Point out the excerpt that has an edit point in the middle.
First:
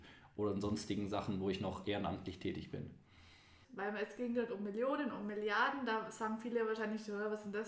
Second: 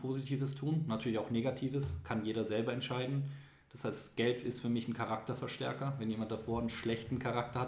first; 1 cut; at 3.6 s

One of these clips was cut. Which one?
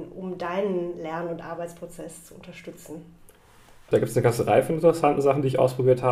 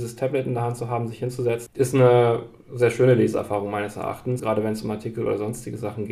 second; 2 cuts; at 1.7 s, 4.4 s

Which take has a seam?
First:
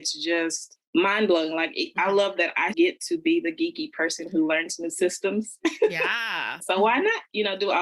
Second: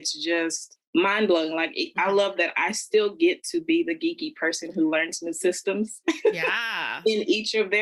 first; 2 cuts; at 2.7 s, 6.6 s

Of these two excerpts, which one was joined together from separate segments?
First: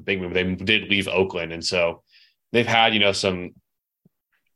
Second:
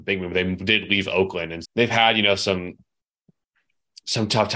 second; 1 cut; at 1.6 s

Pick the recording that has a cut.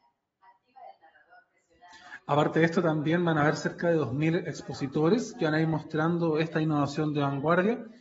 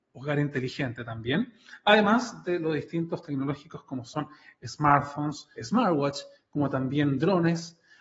second; 1 cut; at 5.6 s

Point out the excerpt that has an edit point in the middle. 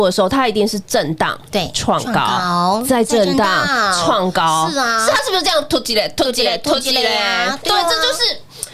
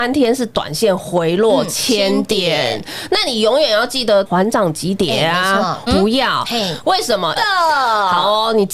second; 3 cuts; at 4.3 s, 5.9 s, 7.4 s

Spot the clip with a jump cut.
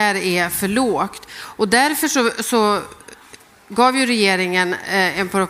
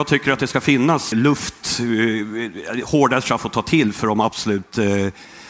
second; 1 cut; at 1.1 s

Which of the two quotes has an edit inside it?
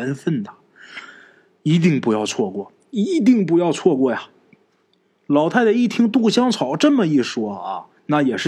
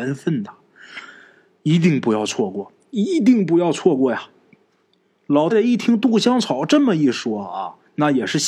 second; 1 cut; at 5.5 s

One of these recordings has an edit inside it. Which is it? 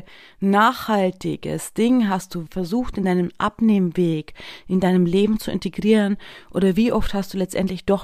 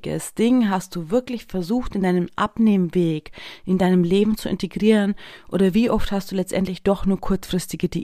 first; 1 cut; at 2.5 s

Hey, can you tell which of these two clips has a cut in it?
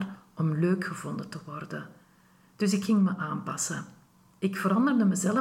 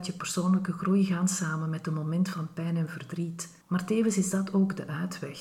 second; 1 cut; at 3.6 s

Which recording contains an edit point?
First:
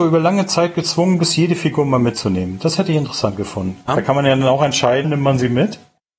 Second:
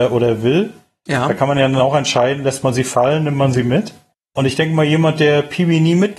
first; 2 cuts; at 3.9 s, 5.0 s

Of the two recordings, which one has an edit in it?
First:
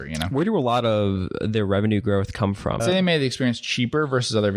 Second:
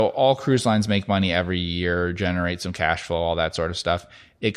first; 1 cut; at 2.8 s

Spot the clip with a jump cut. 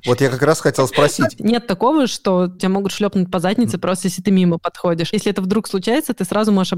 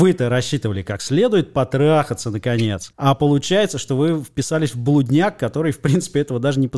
first; 1 cut; at 1.4 s

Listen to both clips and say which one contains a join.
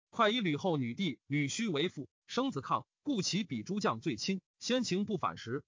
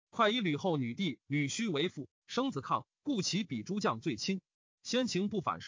first; 1 cut; at 4.5 s

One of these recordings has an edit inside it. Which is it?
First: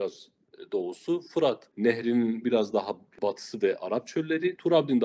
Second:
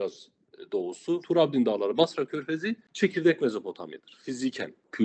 second; 1 cut; at 1.2 s

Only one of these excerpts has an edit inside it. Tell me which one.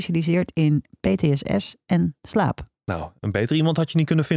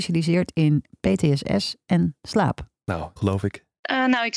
second; 1 cut; at 3.2 s

